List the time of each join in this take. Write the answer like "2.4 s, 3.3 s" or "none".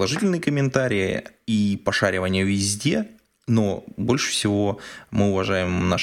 none